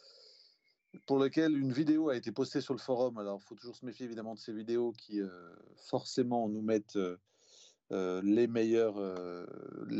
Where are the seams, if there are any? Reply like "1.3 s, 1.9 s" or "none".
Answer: none